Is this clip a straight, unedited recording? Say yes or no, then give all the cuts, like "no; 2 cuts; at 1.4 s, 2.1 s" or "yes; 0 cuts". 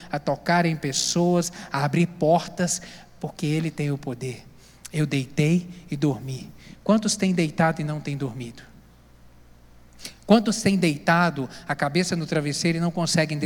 yes; 0 cuts